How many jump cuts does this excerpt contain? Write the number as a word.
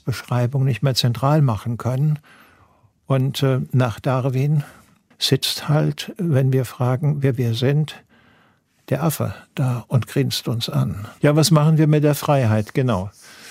two